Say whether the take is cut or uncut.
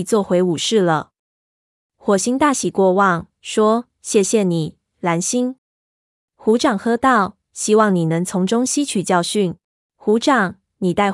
cut